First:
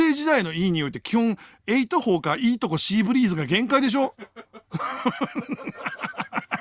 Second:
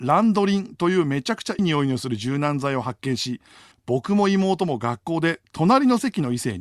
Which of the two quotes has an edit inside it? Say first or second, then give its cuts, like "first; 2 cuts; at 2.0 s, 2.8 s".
second; 2 cuts; at 1.6 s, 3.7 s